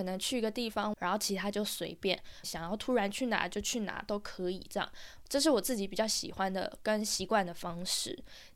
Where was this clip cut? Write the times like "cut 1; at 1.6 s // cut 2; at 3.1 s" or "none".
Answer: cut 1; at 0.9 s // cut 2; at 2.4 s

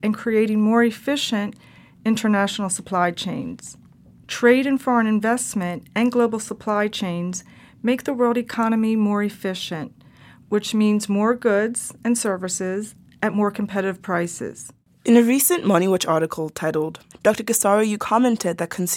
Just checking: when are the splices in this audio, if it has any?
cut 1; at 17.1 s

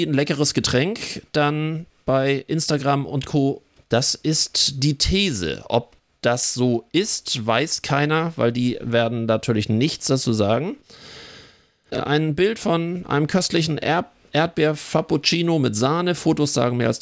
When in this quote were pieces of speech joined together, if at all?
cut 1; at 3.8 s

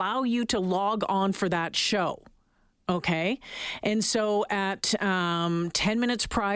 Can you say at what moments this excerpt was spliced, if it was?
none

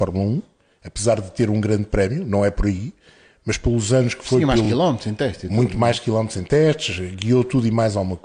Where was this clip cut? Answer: none

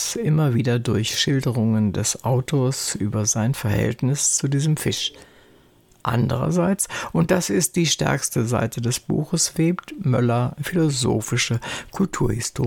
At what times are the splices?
none

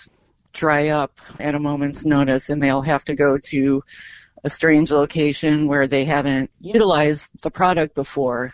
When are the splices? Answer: cut 1; at 1.4 s

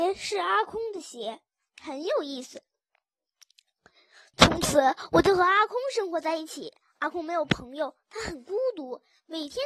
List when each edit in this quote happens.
cut 1; at 1.7 s

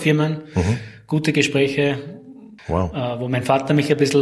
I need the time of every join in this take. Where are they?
cut 1; at 2.6 s

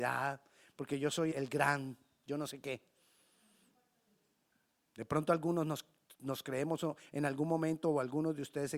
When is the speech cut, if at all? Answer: cut 1; at 1.3 s

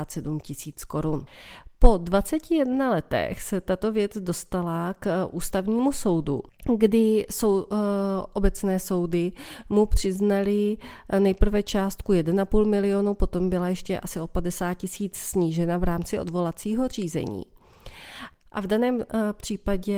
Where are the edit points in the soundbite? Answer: none

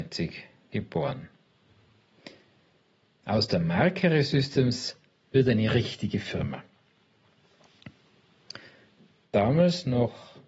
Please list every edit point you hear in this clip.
cut 1; at 3.1 s // cut 2; at 9.2 s

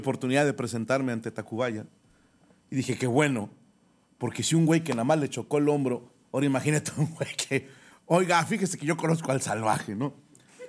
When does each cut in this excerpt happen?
none

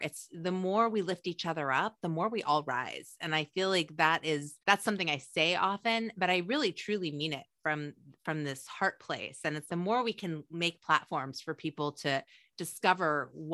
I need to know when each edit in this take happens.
cut 1; at 4.6 s // cut 2; at 9.7 s

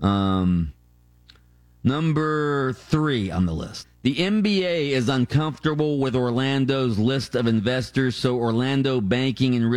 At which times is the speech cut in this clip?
cut 1; at 3.8 s

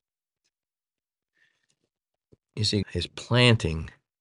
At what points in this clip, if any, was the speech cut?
cut 1; at 2.8 s

